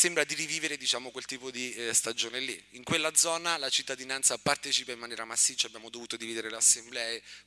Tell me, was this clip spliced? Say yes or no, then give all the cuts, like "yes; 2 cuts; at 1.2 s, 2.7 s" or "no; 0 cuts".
no; 0 cuts